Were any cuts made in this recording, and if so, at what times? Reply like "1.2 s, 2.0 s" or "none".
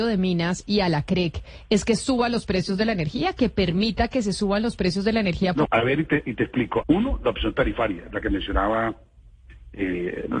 5.7 s, 6.8 s